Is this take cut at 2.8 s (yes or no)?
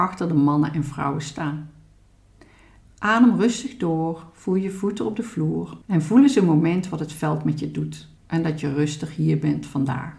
yes